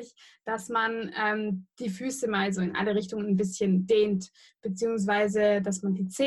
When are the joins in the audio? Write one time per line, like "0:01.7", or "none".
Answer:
none